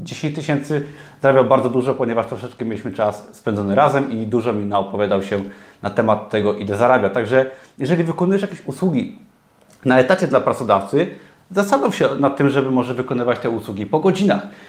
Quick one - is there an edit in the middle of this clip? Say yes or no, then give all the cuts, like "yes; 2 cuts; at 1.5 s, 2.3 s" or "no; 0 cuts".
no; 0 cuts